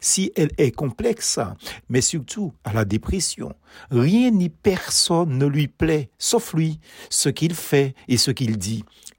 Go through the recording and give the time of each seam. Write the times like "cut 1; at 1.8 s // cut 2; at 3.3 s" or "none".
cut 1; at 1.8 s